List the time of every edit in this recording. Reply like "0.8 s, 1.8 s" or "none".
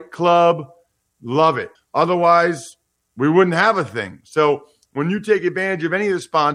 1.7 s